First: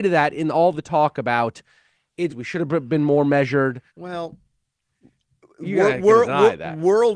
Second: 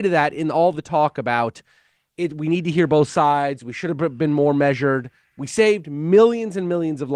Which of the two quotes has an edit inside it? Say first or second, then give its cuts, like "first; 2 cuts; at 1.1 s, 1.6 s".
first; 2 cuts; at 2.3 s, 3.9 s